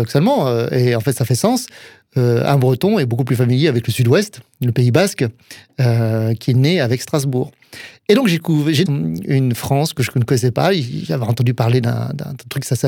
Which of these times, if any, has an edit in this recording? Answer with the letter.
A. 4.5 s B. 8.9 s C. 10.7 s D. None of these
B